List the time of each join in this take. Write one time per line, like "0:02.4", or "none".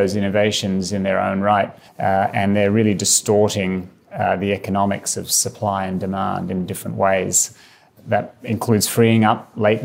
0:01.9

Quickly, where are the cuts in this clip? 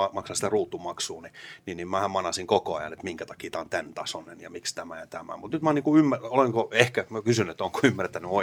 none

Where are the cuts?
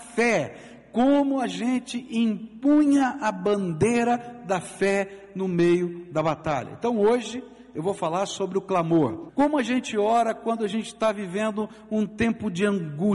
0:09.3

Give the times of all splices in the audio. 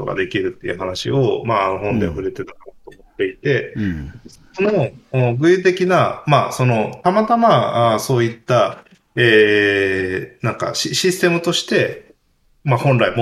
none

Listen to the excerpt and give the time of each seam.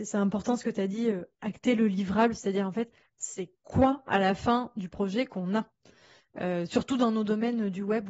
0:03.1

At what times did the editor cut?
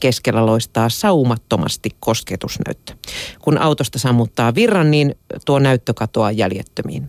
none

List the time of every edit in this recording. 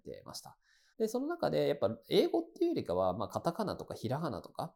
0:00.9

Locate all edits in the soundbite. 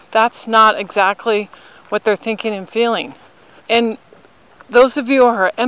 0:03.6

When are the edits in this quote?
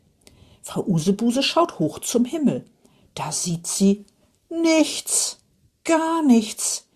none

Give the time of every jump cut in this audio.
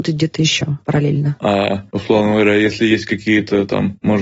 0:01.4

